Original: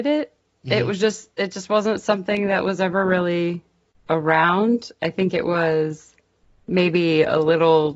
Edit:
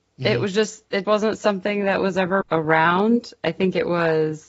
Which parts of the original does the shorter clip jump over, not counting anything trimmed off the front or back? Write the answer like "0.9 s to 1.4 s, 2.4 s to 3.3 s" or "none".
1.5 s to 1.7 s, 3.0 s to 4.0 s